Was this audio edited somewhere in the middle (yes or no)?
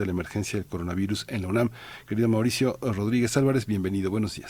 no